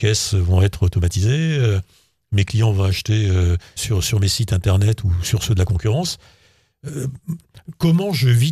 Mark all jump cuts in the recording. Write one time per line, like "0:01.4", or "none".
0:03.8

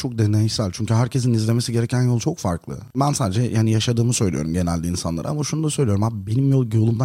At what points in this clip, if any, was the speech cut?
none

